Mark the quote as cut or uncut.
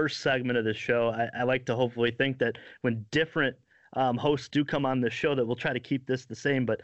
uncut